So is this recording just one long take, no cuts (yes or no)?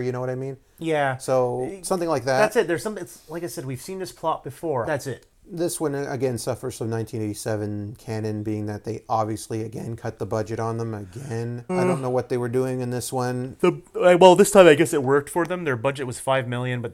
no